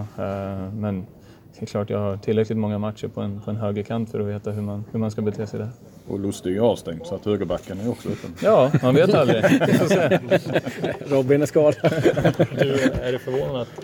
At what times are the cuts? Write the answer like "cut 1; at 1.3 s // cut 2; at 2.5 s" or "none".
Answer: none